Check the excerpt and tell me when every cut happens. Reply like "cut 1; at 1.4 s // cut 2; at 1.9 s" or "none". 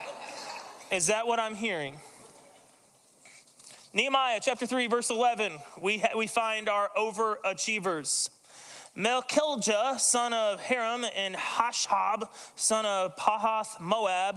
none